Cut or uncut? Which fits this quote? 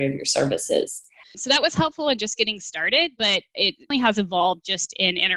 cut